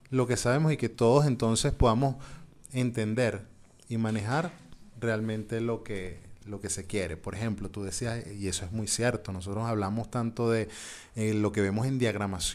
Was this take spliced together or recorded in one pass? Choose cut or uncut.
uncut